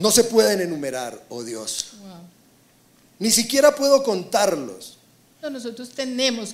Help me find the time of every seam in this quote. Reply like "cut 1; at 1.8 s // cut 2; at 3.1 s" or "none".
cut 1; at 5.4 s